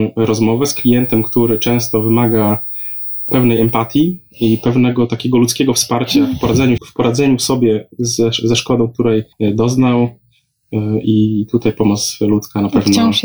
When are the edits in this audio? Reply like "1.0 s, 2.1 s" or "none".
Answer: 6.8 s, 9.3 s